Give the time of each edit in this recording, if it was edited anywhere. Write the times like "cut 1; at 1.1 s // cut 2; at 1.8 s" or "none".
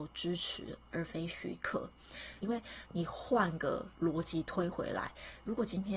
cut 1; at 2.4 s // cut 2; at 3.9 s